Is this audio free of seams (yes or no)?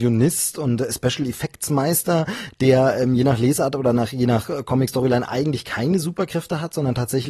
yes